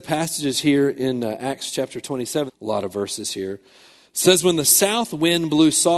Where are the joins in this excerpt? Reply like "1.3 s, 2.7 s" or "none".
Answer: 2.5 s